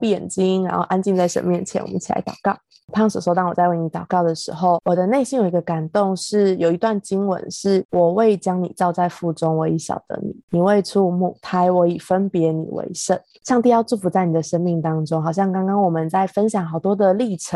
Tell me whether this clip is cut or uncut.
uncut